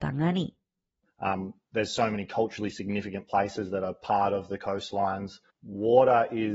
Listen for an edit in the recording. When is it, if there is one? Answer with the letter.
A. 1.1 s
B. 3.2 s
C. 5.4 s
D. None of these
A